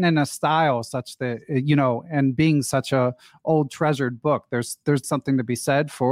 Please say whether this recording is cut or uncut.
cut